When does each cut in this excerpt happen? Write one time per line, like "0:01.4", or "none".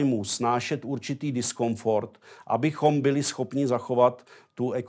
none